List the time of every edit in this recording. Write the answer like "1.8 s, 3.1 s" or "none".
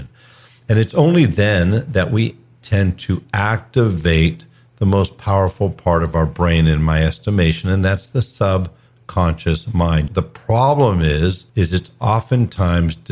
10.1 s, 11.5 s